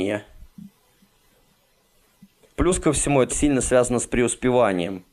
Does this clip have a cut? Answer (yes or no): yes